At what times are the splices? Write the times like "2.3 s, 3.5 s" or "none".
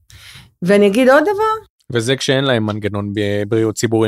none